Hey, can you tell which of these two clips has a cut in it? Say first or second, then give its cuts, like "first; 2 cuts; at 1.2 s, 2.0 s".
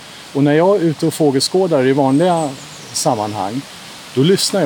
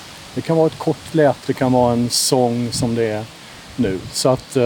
second; 1 cut; at 1.4 s